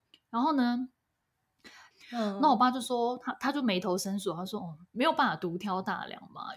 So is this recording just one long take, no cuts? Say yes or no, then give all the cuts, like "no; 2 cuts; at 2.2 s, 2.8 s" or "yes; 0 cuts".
no; 2 cuts; at 1.9 s, 4.9 s